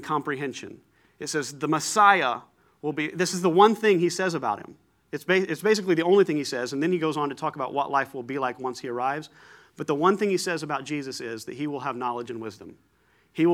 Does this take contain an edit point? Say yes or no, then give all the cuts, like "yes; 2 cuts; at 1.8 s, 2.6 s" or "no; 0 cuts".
no; 0 cuts